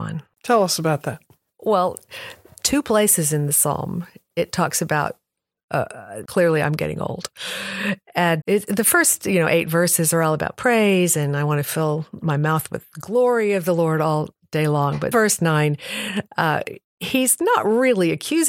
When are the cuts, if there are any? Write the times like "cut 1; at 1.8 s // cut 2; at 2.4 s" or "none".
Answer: cut 1; at 6.3 s // cut 2; at 8.4 s // cut 3; at 15.1 s